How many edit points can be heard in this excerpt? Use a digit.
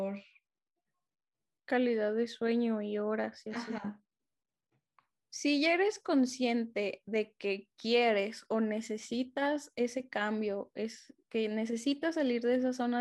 0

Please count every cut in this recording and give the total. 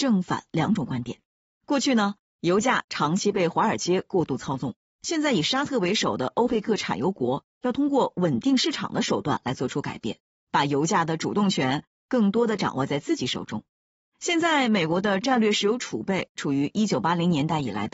1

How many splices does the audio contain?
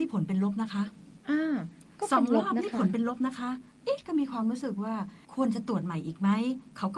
2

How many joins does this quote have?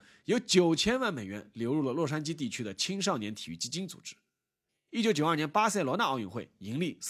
1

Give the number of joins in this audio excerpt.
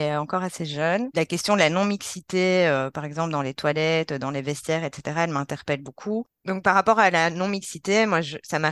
1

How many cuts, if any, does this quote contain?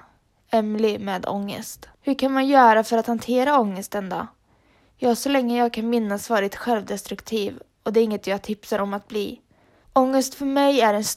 2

